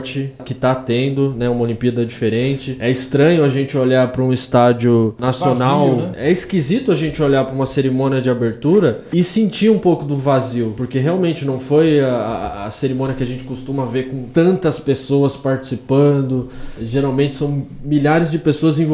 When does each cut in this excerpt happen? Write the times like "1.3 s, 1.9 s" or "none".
6.1 s